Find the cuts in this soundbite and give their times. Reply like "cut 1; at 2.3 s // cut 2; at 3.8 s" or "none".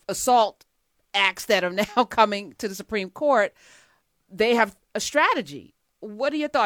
none